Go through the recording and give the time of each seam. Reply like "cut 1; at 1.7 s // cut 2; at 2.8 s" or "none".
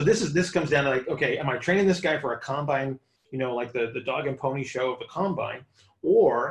none